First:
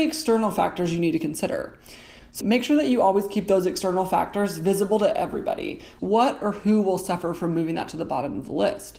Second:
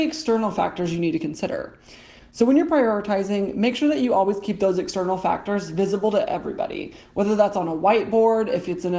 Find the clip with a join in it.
first; 2 cuts; at 2.4 s, 6.0 s

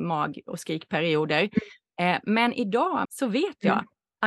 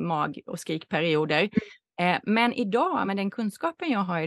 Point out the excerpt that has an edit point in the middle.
first; 1 cut; at 3.0 s

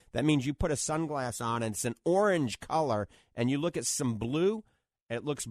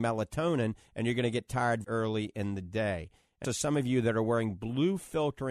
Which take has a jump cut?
second; 2 cuts; at 1.8 s, 3.4 s

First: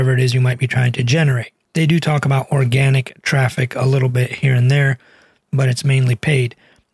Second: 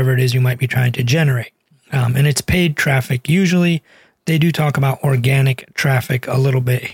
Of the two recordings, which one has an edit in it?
first; 1 cut; at 1.6 s

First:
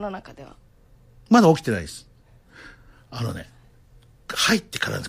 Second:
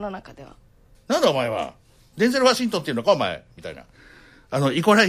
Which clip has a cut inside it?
second; 1 cut; at 0.9 s

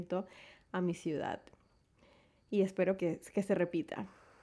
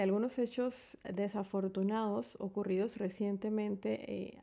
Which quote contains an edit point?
first; 1 cut; at 3.0 s

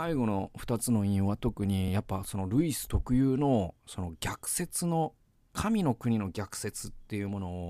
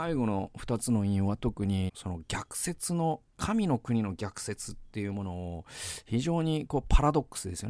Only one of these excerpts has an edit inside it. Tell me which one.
second; 2 cuts; at 1.9 s, 3.3 s

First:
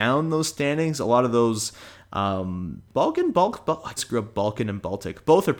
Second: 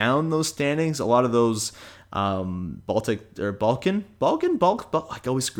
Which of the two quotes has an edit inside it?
first; 2 cuts; at 2.9 s, 4.0 s

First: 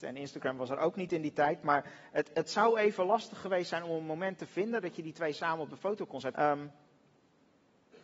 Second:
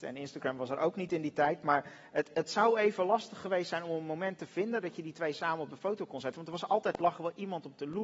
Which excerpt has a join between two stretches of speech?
first; 1 cut; at 6.3 s

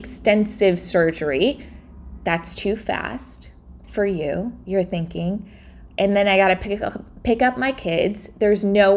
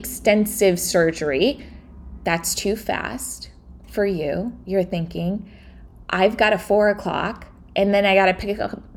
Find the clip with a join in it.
first; 1 cut; at 5.9 s

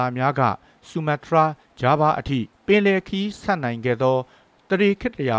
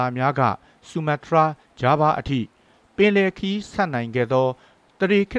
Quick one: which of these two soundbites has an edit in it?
first; 1 cut; at 2.5 s

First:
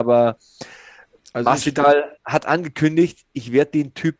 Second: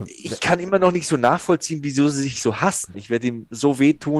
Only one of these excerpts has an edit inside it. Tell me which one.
second; 1 cut; at 2.9 s

